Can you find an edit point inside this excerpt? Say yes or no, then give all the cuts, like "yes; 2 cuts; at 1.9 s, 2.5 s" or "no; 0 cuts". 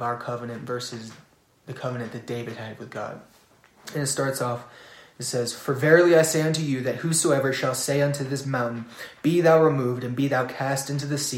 no; 0 cuts